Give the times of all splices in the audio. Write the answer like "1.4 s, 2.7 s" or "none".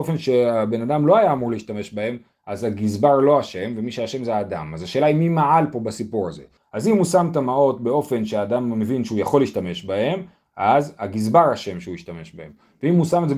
6.6 s